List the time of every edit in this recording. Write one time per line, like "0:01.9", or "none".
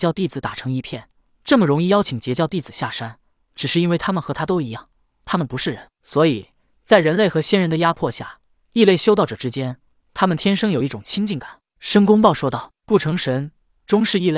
0:11.7